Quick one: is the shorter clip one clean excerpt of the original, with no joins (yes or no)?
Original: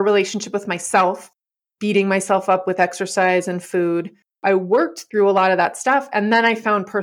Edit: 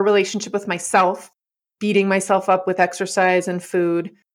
yes